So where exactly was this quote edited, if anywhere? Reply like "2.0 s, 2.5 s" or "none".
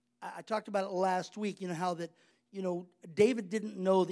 2.3 s